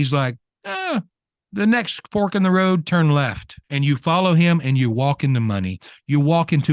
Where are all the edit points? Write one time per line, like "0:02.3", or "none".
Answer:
0:03.6

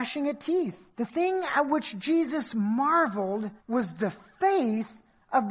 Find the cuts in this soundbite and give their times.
0:00.9
0:03.6

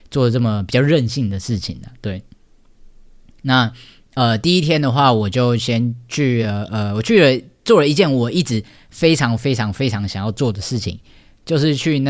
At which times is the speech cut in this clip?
none

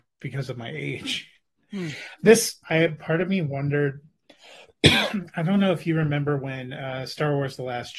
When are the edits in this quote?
0:02.6

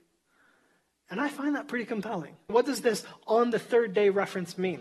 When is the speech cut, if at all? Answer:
0:02.5

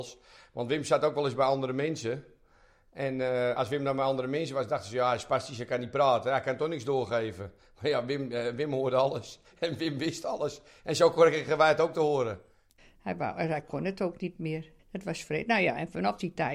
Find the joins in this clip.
0:12.8
0:14.8

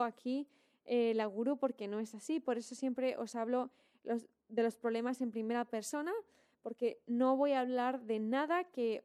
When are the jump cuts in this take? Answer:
none

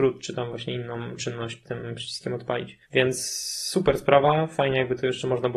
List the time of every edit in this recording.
0:02.8

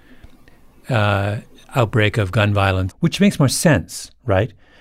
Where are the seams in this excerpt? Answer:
0:02.9

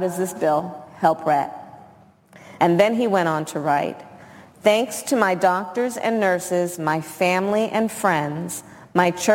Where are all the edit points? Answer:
0:02.6

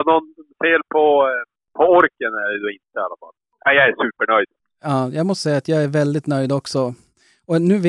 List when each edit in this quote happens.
0:03.5

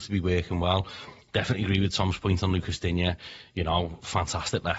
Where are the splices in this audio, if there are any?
none

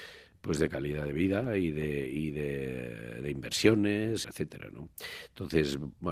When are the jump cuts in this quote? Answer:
0:04.2

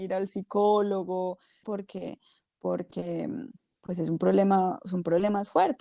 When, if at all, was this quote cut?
0:01.6

